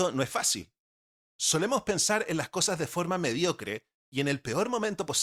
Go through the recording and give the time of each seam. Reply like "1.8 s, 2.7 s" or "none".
1.3 s